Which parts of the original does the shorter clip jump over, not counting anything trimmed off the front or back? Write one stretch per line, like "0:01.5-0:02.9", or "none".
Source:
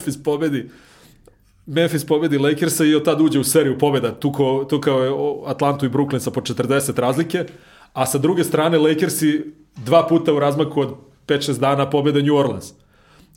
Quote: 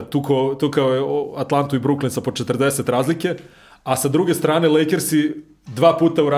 none